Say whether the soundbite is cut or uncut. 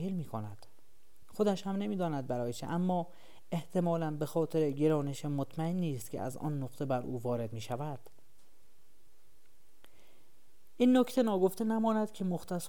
uncut